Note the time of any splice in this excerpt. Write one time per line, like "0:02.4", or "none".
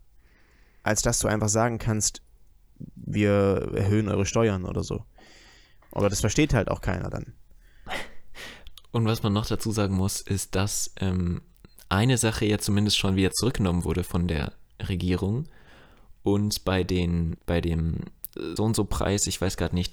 0:17.4
0:18.6